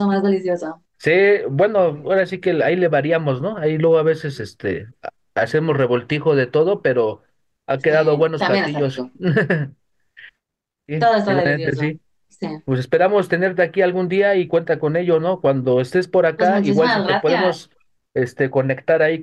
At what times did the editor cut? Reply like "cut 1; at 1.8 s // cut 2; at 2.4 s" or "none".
cut 1; at 0.9 s